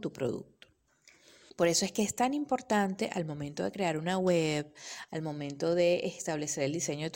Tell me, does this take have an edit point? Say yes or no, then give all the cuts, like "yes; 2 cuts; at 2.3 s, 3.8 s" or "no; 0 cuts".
yes; 2 cuts; at 1.5 s, 5.1 s